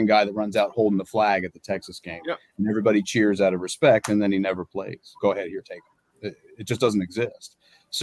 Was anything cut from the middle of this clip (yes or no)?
yes